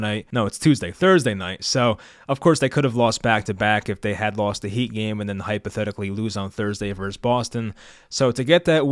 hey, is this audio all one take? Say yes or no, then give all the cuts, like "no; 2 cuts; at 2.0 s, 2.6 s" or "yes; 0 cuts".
yes; 0 cuts